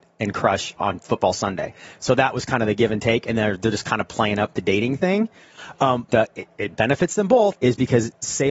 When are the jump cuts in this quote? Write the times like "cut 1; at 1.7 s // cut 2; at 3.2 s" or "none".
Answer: cut 1; at 6.1 s // cut 2; at 7.5 s